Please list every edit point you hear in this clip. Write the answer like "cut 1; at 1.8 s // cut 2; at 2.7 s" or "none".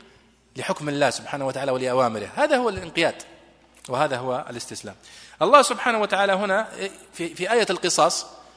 none